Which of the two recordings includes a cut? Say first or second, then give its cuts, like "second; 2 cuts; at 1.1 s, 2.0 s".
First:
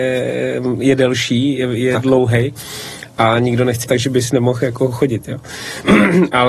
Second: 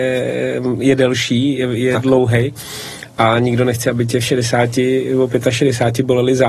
first; 1 cut; at 3.8 s